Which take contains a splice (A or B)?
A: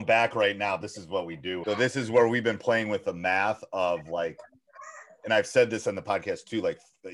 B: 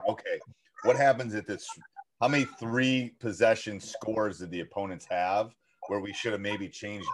A